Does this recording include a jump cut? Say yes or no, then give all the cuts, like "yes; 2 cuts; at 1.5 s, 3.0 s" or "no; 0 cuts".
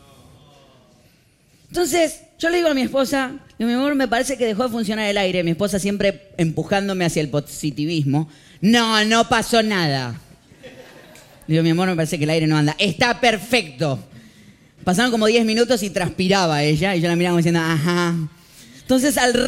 no; 0 cuts